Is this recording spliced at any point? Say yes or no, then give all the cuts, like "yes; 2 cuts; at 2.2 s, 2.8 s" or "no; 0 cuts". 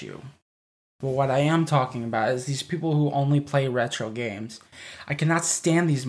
no; 0 cuts